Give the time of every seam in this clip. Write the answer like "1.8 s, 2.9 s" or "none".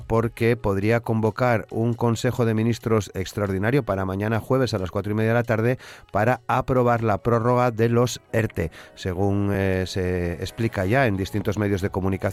none